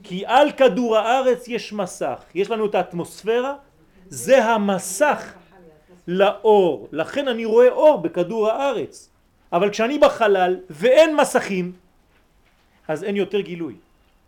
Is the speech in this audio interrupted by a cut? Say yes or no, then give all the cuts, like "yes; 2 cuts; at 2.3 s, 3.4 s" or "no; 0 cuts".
no; 0 cuts